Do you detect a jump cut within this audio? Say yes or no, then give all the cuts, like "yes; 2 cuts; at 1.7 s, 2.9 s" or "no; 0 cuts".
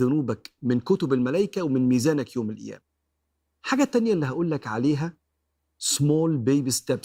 no; 0 cuts